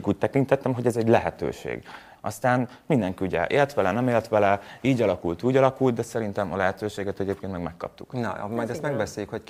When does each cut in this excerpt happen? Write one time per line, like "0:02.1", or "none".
0:02.2